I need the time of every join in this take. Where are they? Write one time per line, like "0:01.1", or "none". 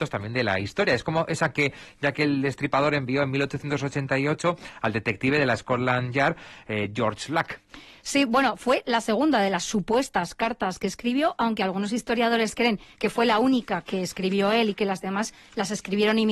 none